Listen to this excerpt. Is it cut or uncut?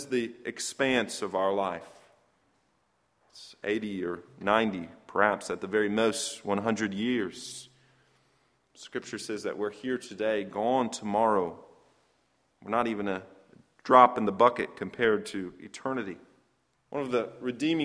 cut